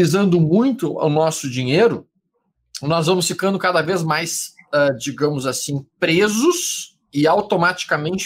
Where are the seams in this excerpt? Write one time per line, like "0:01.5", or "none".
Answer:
none

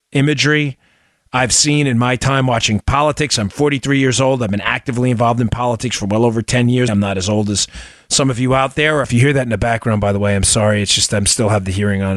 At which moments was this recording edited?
0:06.9
0:09.0

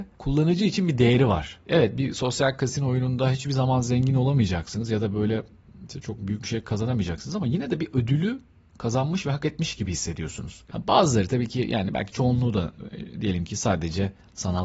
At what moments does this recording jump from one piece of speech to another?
0:10.7

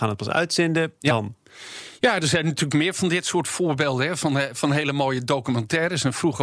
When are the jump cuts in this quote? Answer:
0:01.0

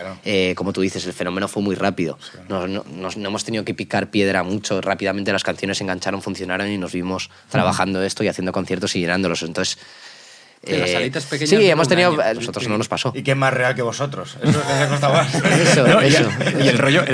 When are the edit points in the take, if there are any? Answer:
0:12.3

